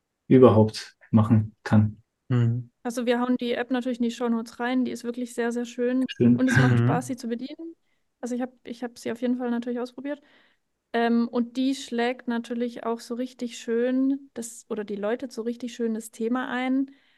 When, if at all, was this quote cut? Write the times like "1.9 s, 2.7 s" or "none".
6.1 s